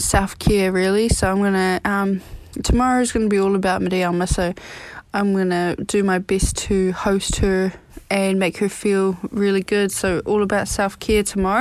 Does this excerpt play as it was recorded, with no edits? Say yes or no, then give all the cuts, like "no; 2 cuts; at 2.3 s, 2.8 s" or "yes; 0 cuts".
yes; 0 cuts